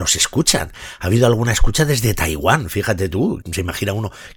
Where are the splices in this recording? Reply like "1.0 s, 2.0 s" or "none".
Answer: 3.4 s